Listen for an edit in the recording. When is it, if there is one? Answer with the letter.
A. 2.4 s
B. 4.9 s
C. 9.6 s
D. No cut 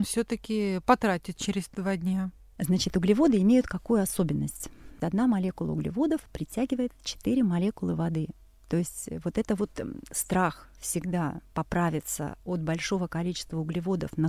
D